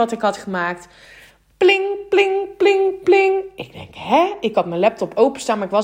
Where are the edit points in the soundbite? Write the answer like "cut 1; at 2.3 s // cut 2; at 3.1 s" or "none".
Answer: none

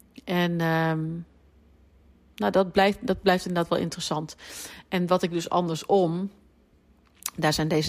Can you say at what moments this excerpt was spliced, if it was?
none

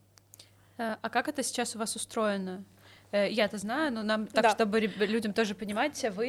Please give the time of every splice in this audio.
none

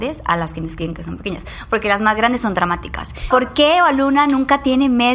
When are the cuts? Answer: cut 1; at 3.3 s

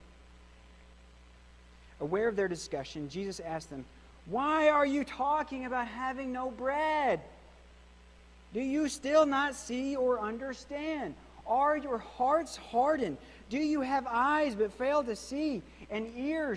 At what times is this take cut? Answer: none

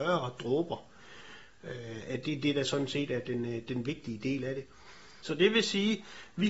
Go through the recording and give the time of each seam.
cut 1; at 5.2 s

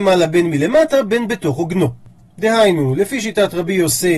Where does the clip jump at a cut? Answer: cut 1; at 2.2 s

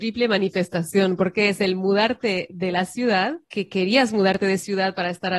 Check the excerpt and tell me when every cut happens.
cut 1; at 3.4 s

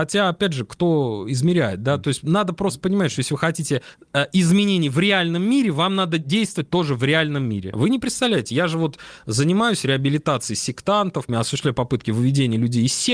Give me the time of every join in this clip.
cut 1; at 7.7 s // cut 2; at 11.3 s

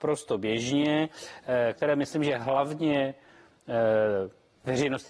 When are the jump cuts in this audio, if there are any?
cut 1; at 1.7 s

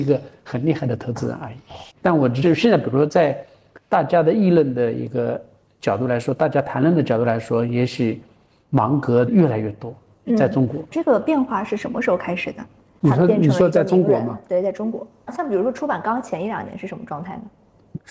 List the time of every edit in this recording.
none

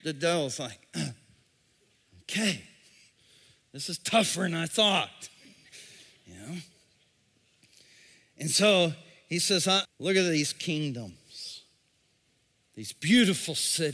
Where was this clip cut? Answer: cut 1; at 9.8 s

